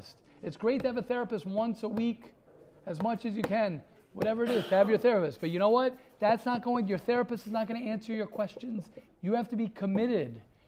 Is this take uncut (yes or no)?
no